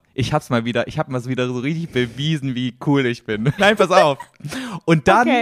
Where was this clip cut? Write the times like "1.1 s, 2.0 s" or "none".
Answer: 3.6 s